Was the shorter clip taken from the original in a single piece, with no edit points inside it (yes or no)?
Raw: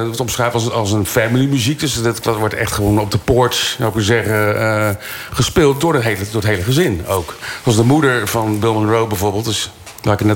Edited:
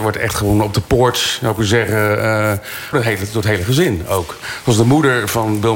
no